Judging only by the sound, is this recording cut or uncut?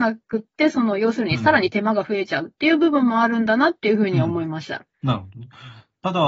cut